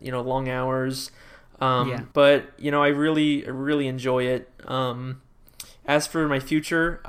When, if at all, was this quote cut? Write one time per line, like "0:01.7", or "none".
0:02.1